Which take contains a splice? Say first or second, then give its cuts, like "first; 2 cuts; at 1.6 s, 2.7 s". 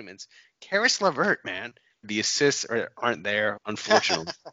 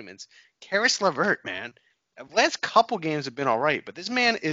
first; 2 cuts; at 2.0 s, 3.6 s